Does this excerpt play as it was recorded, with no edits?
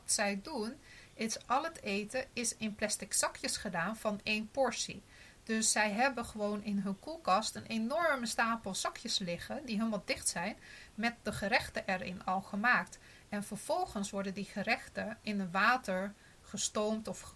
yes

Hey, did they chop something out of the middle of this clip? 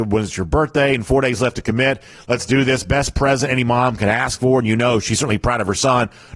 no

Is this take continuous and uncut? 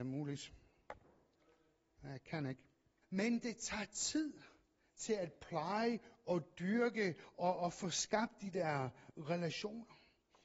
no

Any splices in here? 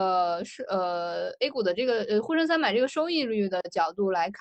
no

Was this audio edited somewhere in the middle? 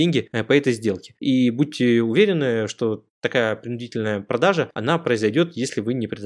yes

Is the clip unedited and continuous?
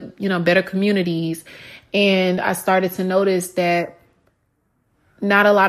yes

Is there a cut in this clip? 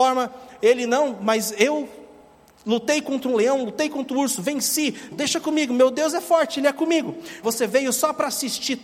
yes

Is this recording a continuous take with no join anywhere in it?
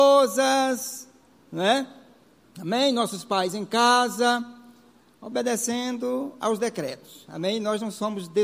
yes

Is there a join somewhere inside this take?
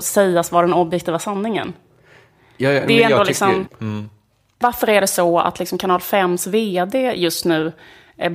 yes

